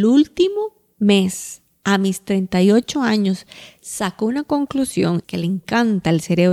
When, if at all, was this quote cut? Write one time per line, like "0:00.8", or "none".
0:05.2